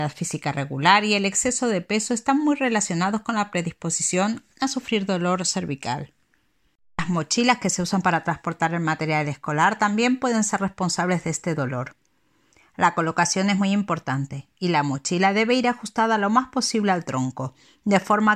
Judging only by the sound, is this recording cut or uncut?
uncut